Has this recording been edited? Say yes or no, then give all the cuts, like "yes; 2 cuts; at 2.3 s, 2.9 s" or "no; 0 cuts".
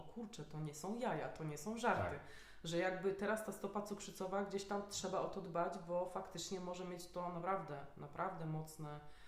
no; 0 cuts